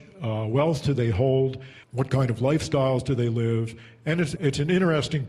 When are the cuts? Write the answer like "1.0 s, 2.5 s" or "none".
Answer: 1.8 s, 4.4 s